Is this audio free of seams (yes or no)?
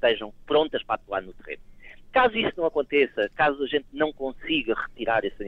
yes